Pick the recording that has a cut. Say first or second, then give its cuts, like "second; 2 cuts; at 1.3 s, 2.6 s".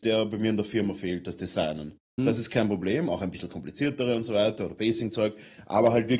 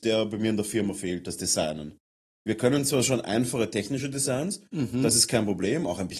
first; 1 cut; at 2.2 s